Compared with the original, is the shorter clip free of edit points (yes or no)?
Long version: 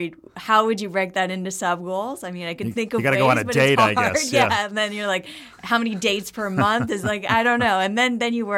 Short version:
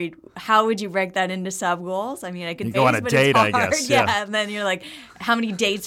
no